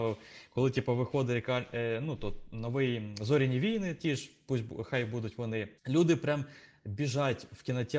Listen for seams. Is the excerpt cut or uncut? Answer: cut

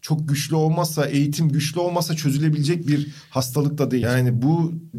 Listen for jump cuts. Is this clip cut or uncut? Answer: cut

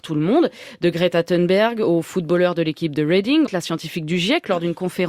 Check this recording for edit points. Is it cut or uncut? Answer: cut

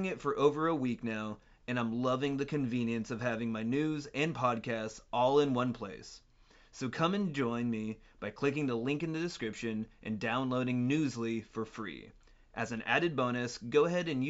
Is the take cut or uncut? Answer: uncut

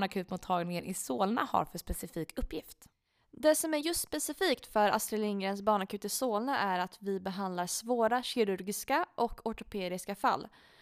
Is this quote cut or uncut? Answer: uncut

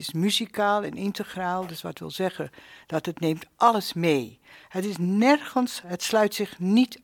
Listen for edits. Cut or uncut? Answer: uncut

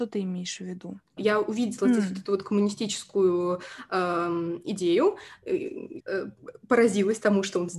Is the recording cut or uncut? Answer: cut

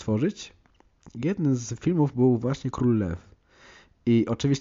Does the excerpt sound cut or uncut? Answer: uncut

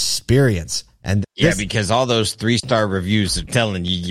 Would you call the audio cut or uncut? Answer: cut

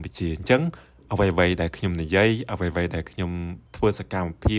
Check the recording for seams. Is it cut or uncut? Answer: cut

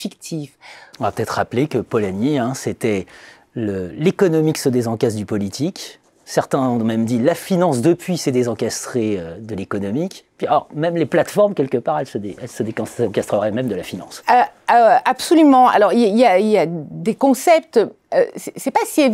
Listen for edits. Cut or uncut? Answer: cut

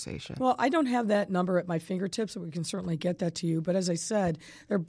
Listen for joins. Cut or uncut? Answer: uncut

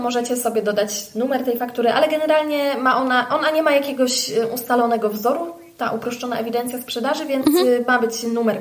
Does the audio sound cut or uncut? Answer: uncut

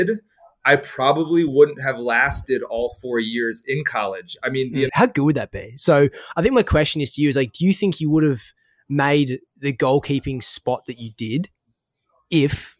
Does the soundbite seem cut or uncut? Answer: cut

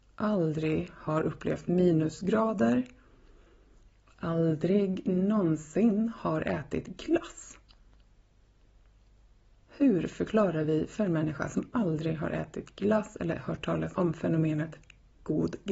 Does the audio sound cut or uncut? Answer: uncut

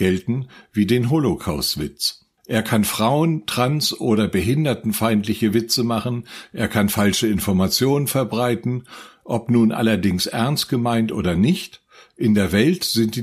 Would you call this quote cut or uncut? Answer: uncut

